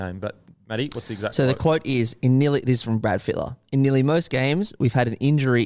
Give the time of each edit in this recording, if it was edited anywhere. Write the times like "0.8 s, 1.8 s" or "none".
none

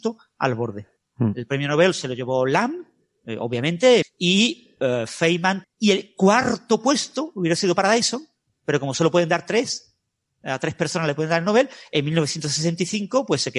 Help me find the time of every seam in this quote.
1.0 s, 4.0 s, 5.6 s

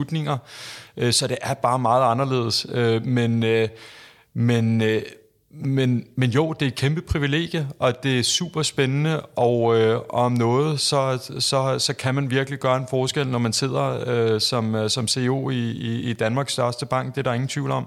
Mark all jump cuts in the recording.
none

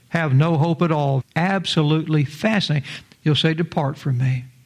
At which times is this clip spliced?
1.2 s, 3.0 s

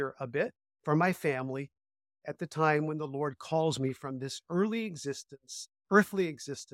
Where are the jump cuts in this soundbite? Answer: none

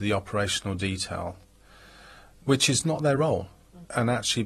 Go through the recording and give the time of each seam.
none

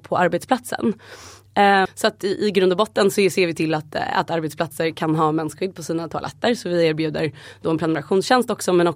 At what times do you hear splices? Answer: 1.9 s

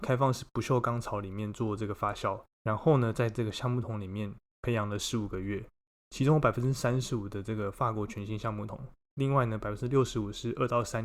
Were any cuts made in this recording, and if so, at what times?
2.5 s

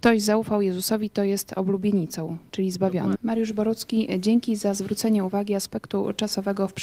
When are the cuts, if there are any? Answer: 3.2 s

